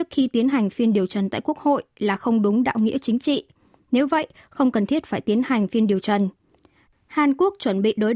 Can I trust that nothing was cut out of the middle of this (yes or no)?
no